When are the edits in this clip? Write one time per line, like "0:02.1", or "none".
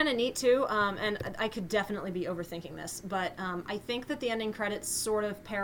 none